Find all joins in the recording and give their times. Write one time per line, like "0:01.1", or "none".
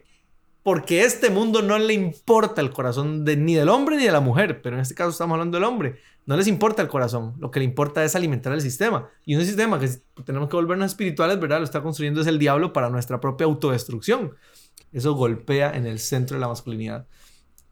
0:14.8